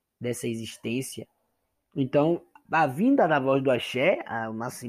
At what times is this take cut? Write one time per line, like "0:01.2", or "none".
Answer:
0:02.7